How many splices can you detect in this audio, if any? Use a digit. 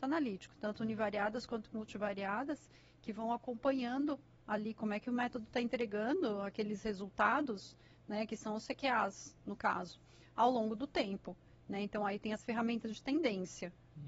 0